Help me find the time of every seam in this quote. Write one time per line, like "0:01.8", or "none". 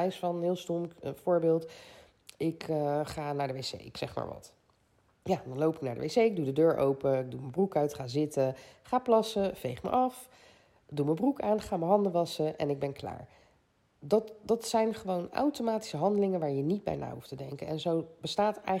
none